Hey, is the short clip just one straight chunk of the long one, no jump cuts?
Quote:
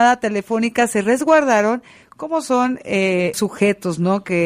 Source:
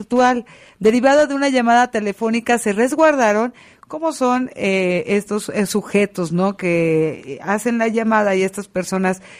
no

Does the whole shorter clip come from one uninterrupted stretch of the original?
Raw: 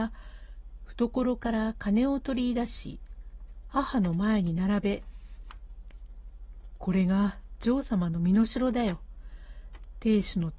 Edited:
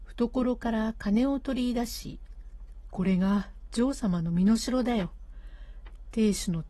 no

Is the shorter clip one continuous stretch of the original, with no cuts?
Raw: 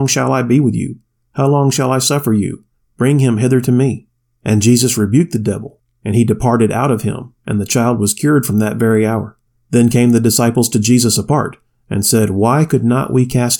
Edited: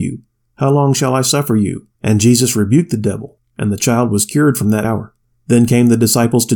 no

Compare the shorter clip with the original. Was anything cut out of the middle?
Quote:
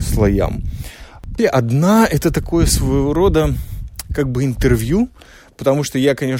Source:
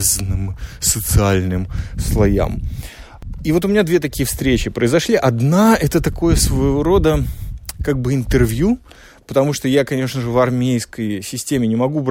yes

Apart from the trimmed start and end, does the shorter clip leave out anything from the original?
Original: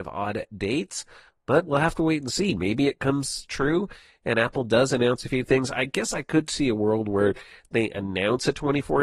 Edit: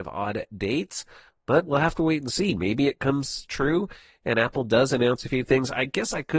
no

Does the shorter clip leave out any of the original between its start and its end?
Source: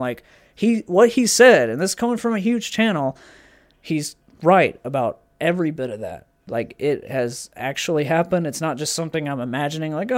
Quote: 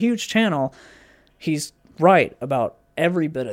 no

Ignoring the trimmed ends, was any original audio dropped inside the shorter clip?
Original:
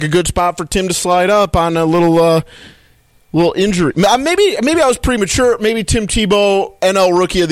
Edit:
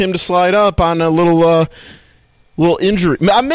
no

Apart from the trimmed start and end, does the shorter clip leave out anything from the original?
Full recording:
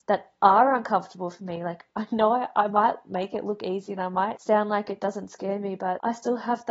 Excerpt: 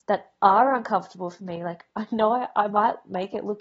no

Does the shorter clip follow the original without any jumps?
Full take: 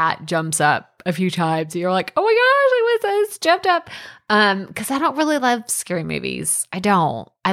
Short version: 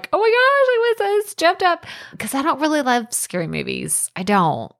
no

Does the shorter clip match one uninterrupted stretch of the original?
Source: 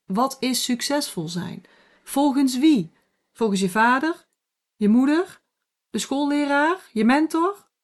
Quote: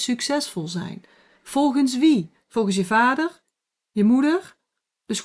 no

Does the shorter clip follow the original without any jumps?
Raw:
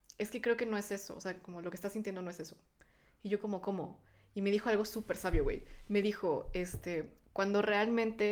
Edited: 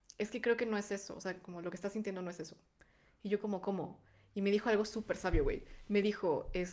yes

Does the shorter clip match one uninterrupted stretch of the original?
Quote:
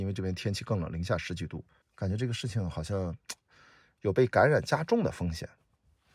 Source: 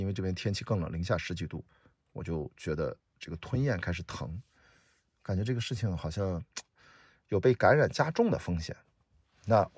no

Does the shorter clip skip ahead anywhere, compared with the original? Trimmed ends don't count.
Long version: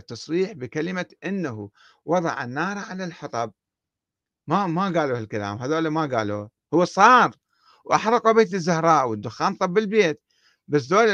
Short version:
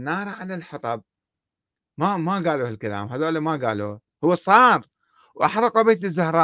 no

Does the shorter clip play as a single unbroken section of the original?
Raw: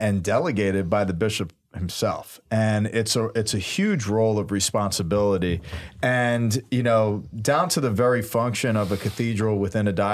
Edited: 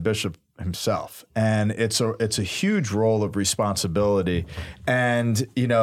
yes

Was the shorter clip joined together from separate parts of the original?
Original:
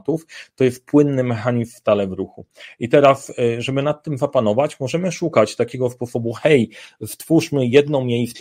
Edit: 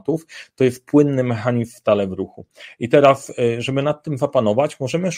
no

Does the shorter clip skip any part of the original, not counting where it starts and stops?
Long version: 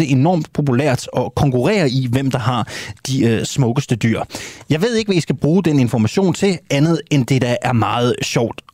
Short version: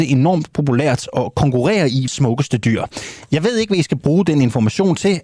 yes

